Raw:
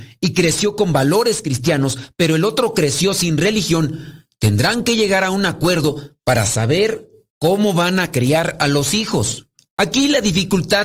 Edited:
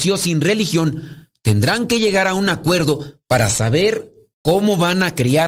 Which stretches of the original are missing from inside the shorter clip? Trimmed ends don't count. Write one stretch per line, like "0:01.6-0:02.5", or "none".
none